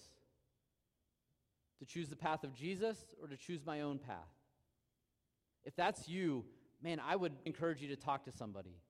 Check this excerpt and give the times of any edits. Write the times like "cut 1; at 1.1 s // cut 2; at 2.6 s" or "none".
cut 1; at 5.5 s // cut 2; at 7.5 s